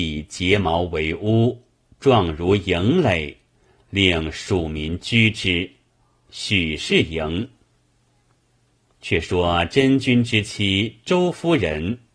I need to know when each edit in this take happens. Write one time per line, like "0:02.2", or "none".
0:06.3